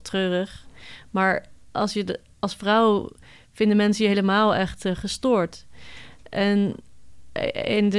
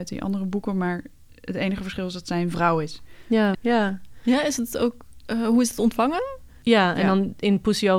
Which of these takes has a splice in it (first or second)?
second